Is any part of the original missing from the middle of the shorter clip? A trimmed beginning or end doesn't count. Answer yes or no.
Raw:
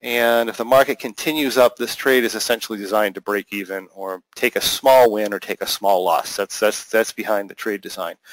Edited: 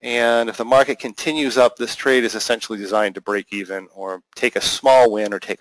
no